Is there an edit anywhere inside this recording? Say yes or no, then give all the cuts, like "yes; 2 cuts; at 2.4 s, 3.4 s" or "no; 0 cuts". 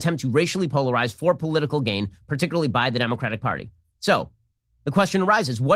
no; 0 cuts